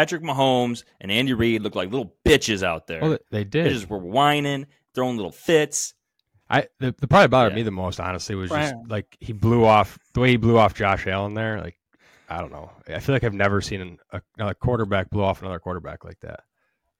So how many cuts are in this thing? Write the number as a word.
zero